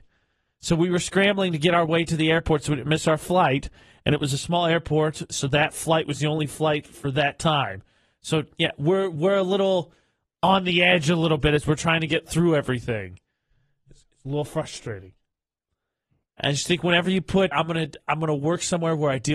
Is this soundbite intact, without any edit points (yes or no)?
no